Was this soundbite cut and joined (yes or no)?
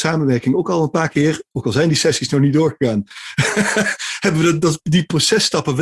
no